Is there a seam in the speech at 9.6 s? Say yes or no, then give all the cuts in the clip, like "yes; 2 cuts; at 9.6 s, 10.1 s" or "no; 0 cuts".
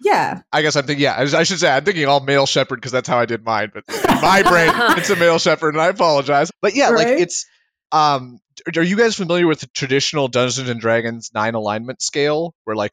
yes; 3 cuts; at 5.0 s, 6.5 s, 9.6 s